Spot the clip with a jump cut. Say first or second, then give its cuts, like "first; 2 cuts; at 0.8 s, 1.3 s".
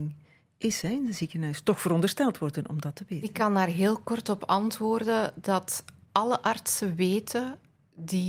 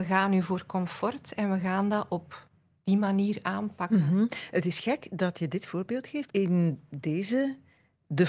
second; 1 cut; at 6.3 s